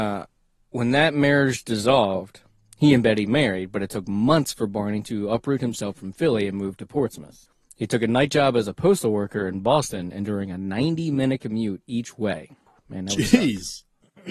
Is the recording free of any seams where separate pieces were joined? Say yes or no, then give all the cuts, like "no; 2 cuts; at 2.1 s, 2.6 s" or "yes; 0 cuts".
yes; 0 cuts